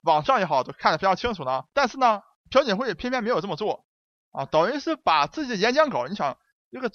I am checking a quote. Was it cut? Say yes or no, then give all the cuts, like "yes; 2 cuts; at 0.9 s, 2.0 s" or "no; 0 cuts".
yes; 1 cut; at 1.7 s